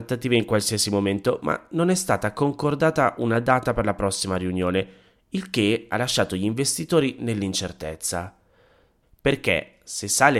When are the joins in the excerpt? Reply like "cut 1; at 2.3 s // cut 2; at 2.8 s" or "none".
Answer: cut 1; at 9.0 s